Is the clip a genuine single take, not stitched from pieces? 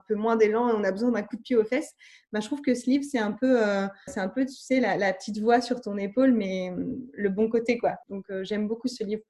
no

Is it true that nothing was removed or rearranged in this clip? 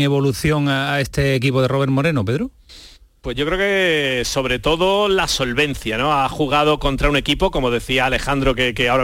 yes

